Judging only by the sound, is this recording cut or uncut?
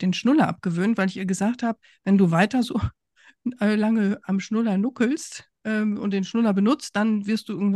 uncut